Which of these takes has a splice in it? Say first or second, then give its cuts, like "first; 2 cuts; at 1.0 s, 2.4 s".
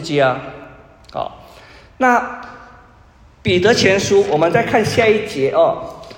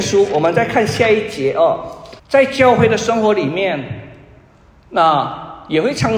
second; 1 cut; at 2.2 s